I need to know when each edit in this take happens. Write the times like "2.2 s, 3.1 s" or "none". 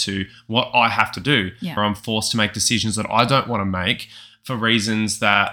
1.8 s